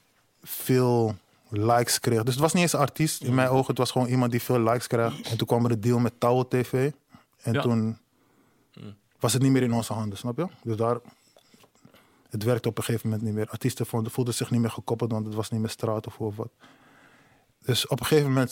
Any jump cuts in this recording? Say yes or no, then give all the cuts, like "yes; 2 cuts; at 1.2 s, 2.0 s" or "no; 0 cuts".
yes; 1 cut; at 5.2 s